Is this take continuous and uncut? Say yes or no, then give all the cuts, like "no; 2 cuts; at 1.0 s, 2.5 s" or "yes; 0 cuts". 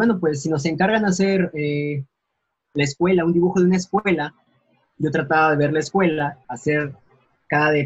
no; 1 cut; at 6.4 s